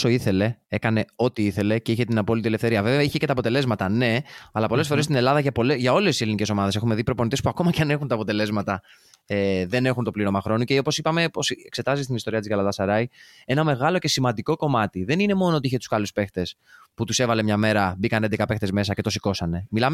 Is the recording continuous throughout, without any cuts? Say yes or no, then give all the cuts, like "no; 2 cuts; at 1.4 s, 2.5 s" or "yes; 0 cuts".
yes; 0 cuts